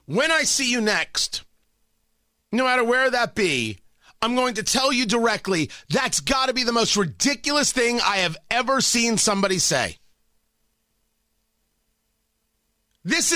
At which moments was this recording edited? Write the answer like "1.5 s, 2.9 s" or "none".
none